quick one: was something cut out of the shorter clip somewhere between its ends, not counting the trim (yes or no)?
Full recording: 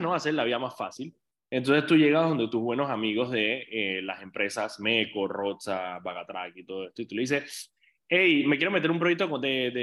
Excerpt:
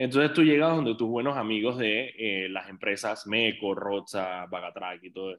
no